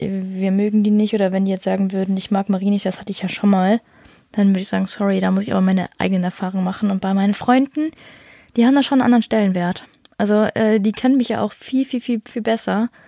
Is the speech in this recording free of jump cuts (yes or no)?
yes